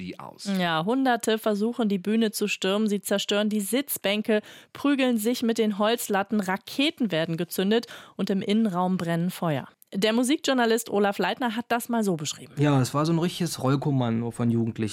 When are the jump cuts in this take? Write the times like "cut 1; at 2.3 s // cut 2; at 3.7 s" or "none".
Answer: none

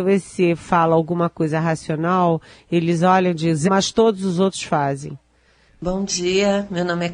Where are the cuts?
cut 1; at 3.7 s // cut 2; at 5.7 s

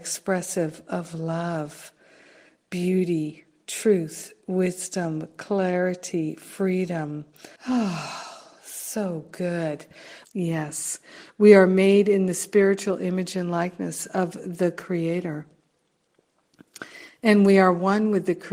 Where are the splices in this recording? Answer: cut 1; at 7.6 s // cut 2; at 10.2 s

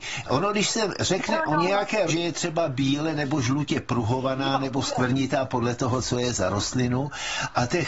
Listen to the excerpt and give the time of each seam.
cut 1; at 2.1 s

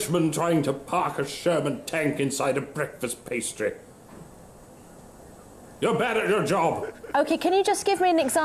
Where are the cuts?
none

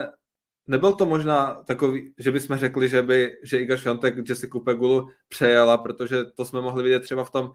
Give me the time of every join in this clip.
none

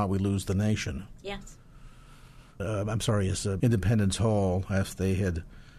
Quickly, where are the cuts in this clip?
cut 1; at 2.6 s // cut 2; at 3.6 s

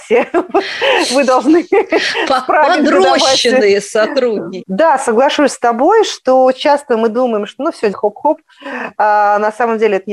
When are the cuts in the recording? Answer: cut 1; at 4.6 s // cut 2; at 7.9 s

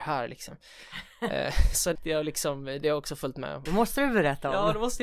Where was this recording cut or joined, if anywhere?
cut 1; at 2.0 s // cut 2; at 3.7 s

